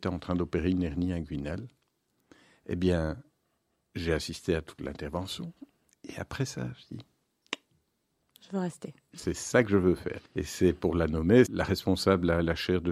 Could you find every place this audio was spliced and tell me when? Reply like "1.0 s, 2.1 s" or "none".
10.3 s, 11.5 s